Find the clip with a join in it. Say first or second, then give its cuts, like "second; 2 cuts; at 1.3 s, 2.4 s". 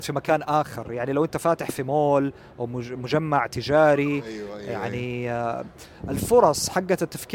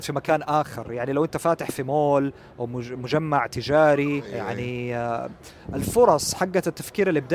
second; 1 cut; at 4.2 s